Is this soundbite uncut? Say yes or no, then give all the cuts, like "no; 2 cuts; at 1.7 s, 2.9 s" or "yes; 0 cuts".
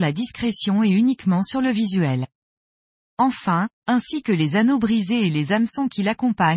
no; 1 cut; at 3.7 s